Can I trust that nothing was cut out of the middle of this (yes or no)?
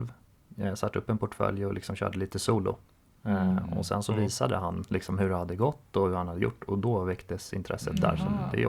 yes